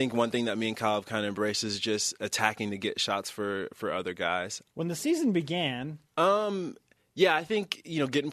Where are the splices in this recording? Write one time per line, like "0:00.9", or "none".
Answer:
0:04.6
0:06.1

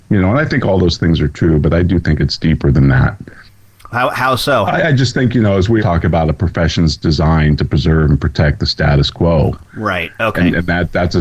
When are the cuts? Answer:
0:04.7
0:05.8

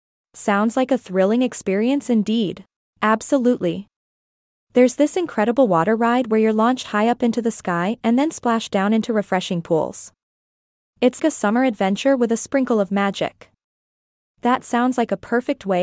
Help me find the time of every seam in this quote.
0:02.9
0:11.2

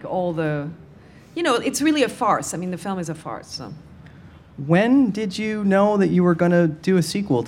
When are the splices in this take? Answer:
none

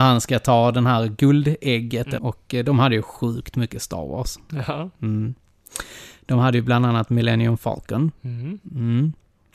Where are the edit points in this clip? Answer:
0:02.2

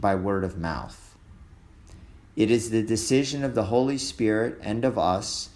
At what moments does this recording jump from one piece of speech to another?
none

